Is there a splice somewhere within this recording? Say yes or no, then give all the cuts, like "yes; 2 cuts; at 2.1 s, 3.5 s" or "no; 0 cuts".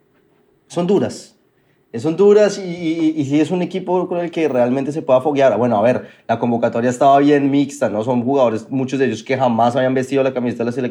no; 0 cuts